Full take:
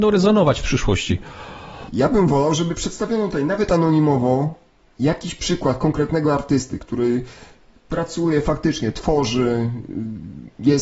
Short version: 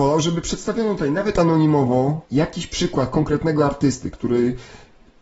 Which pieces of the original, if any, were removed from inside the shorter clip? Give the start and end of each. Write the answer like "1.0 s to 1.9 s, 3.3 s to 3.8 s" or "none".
4.6 s to 4.9 s